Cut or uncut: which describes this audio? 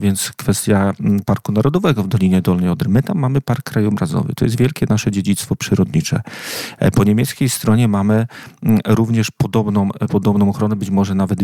uncut